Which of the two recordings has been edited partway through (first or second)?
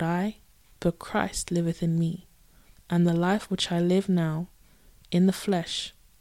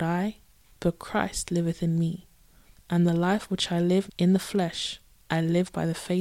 second